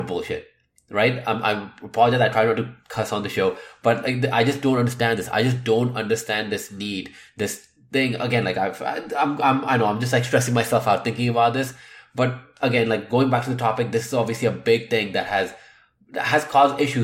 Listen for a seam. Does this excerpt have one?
no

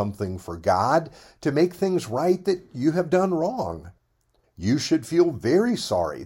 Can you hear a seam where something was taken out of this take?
yes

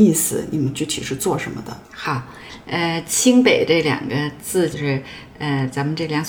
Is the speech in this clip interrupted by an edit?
yes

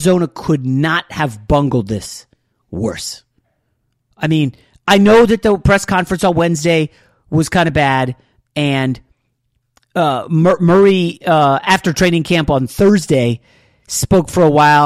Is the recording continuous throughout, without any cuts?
yes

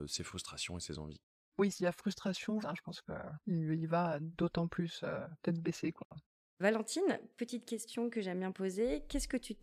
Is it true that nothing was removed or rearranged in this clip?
no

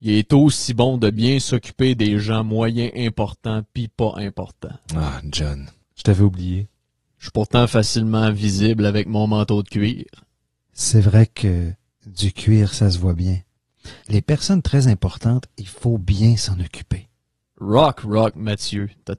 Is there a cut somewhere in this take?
yes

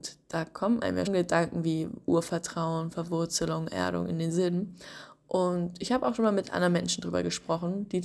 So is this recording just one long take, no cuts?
no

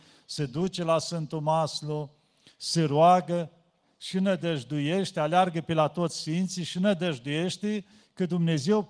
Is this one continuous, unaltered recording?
yes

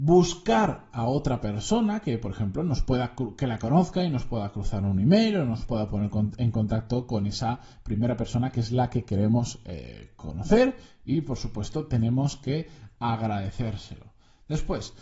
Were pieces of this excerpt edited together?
no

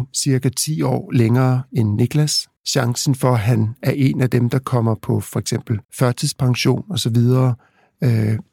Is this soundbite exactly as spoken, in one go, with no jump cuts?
no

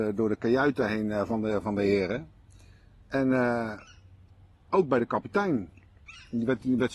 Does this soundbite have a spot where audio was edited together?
no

